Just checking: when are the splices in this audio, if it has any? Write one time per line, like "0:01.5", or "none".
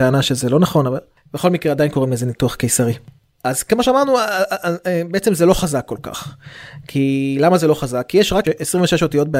0:08.4